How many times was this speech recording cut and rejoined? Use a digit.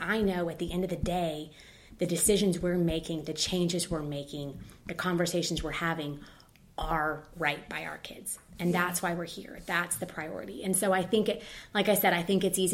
0